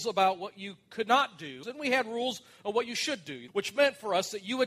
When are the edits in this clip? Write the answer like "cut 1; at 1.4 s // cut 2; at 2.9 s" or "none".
cut 1; at 1.6 s // cut 2; at 3.5 s